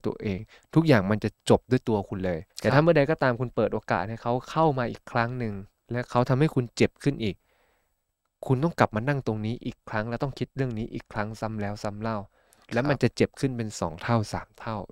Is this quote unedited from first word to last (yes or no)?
no